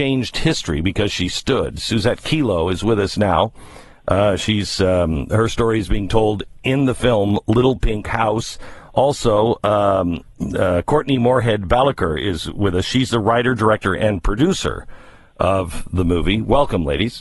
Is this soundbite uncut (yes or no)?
yes